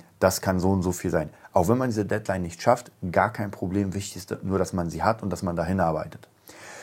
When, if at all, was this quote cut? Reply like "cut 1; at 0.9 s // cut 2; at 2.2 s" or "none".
none